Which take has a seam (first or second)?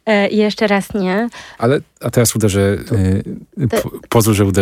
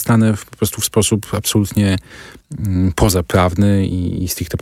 first